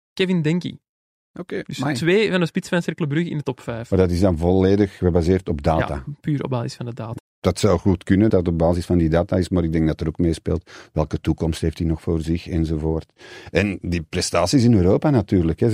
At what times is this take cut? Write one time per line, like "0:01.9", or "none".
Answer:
0:07.2
0:08.3